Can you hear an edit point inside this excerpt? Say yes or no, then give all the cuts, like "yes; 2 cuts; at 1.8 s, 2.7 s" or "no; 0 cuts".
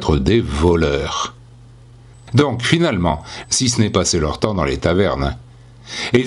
yes; 2 cuts; at 2.1 s, 3.4 s